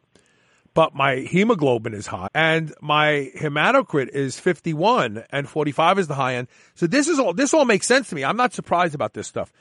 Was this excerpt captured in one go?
no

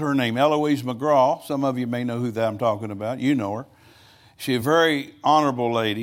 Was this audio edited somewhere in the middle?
no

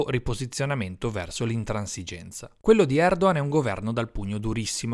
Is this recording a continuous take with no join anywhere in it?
yes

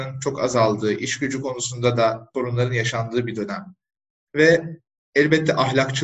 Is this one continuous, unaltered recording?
no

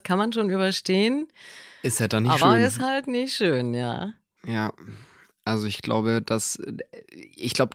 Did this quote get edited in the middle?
no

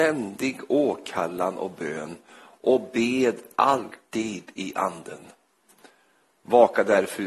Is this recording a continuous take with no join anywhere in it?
yes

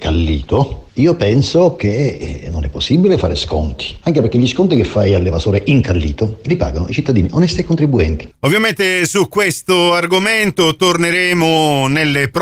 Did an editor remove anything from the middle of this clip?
yes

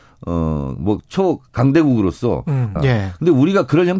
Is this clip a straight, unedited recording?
no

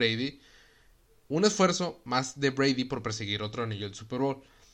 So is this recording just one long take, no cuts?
yes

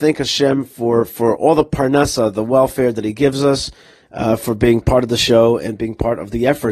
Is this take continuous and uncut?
no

